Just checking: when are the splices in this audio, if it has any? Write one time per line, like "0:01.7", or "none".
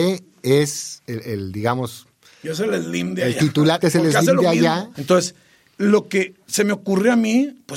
0:03.8
0:04.9